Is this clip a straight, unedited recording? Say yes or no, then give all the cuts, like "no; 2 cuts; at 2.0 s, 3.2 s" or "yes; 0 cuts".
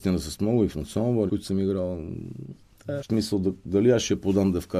no; 2 cuts; at 1.3 s, 3.0 s